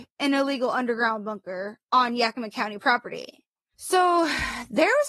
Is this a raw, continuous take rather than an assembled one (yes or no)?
no